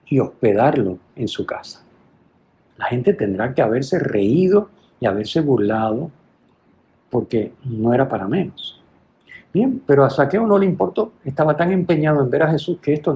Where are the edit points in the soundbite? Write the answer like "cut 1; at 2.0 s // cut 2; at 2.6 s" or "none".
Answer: cut 1; at 2.7 s

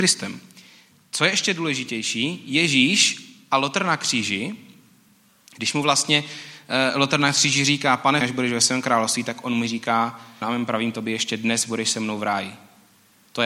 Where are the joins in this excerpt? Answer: cut 1; at 8.2 s // cut 2; at 10.4 s

